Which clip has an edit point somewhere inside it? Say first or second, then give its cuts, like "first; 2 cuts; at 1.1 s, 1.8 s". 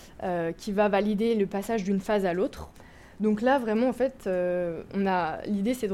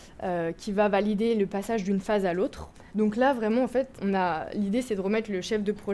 second; 2 cuts; at 2.9 s, 3.9 s